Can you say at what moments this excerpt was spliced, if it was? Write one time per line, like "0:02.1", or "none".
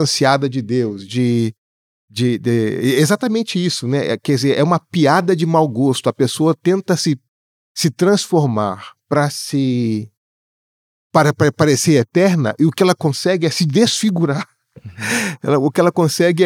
none